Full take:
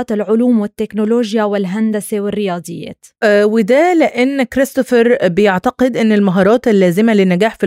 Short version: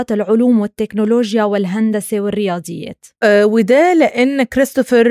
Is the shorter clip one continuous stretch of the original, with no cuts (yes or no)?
yes